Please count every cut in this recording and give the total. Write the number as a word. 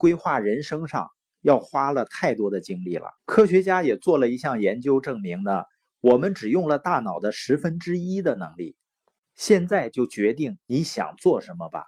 one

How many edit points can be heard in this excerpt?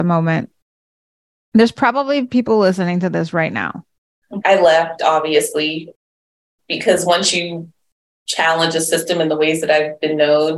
one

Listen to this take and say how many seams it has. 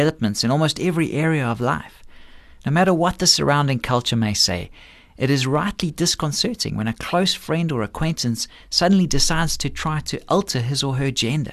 zero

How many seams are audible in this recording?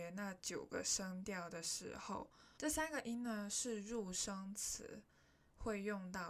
one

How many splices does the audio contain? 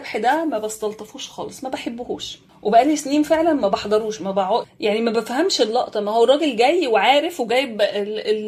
one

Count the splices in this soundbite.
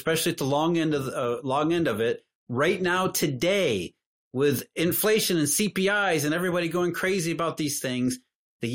one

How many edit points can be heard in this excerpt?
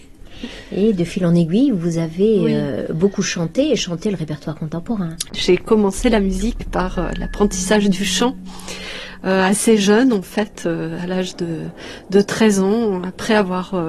one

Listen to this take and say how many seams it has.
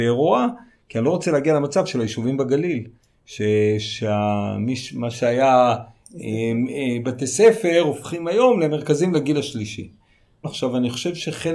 one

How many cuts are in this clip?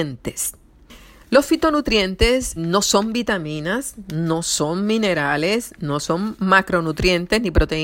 one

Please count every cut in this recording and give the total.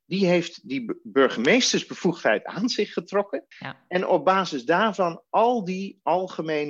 one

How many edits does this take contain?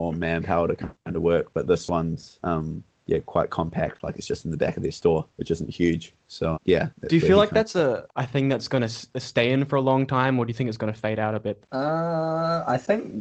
three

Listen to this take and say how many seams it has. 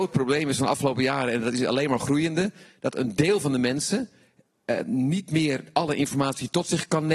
zero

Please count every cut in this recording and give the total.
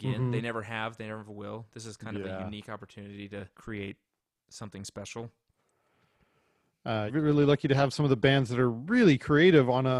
two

